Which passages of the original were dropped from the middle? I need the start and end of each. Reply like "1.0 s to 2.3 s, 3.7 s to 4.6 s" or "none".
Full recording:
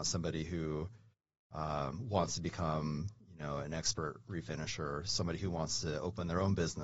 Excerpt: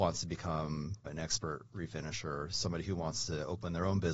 3.2 s to 3.6 s